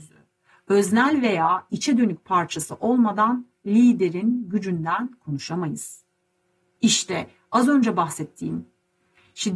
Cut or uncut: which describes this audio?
cut